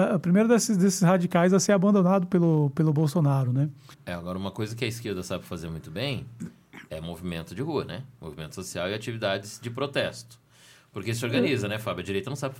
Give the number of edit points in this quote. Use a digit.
1